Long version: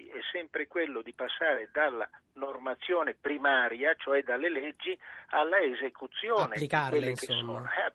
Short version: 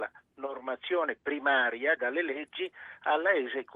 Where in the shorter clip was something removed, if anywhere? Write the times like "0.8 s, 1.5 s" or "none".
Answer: 2.0 s